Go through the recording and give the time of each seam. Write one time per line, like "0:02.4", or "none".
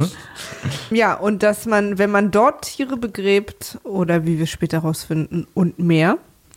0:00.9